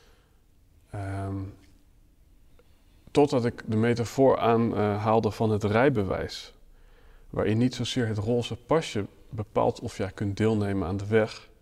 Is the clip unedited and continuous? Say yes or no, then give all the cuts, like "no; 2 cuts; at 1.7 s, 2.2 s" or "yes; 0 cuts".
yes; 0 cuts